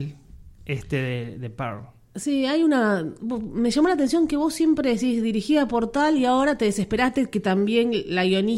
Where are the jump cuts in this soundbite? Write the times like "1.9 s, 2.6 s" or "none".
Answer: none